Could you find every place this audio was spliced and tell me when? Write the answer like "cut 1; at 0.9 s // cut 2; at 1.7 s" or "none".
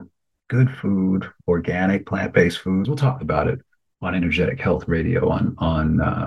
cut 1; at 2.8 s